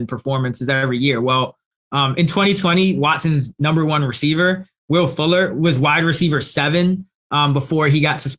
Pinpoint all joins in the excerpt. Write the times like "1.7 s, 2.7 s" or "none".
none

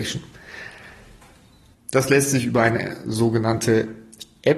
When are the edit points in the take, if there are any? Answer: 1.7 s

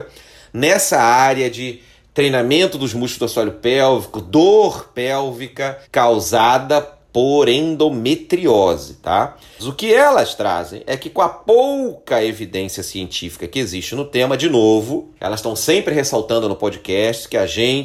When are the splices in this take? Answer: 5.8 s, 9.6 s, 15.2 s

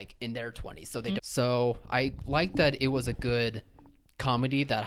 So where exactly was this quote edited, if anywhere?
1.2 s

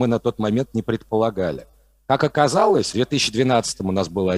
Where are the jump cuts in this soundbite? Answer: none

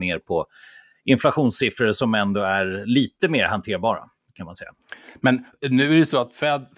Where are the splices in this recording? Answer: none

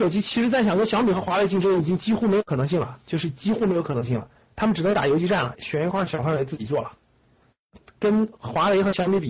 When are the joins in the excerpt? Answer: 5.6 s

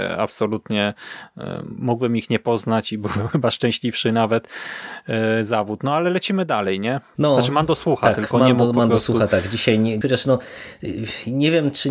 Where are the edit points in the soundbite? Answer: 7.1 s, 10.0 s

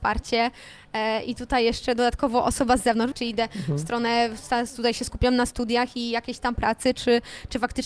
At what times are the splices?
3.1 s

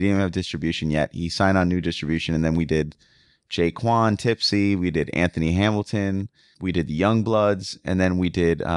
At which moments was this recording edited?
none

